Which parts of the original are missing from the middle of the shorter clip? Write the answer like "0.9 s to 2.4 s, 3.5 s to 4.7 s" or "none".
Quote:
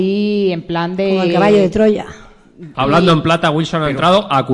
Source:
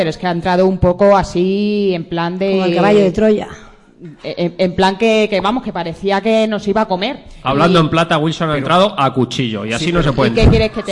4.2 s to 7.4 s